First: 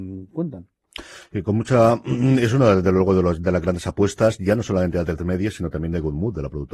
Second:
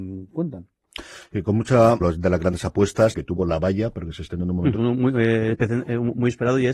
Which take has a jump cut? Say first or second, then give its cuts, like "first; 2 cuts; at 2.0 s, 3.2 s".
second; 3 cuts; at 2.0 s, 3.1 s, 4.8 s